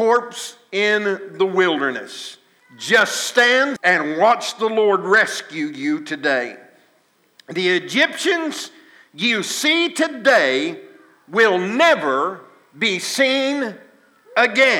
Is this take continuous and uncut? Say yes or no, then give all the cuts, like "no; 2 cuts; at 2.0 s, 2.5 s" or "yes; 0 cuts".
no; 2 cuts; at 2.6 s, 3.8 s